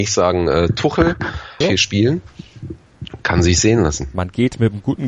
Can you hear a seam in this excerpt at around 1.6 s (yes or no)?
yes